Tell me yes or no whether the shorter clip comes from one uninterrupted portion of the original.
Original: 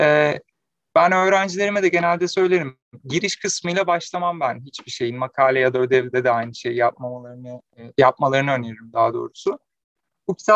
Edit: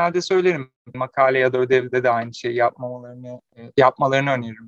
no